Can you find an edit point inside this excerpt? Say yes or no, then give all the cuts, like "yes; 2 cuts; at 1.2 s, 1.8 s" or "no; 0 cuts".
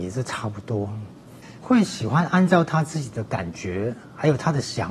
yes; 1 cut; at 1.6 s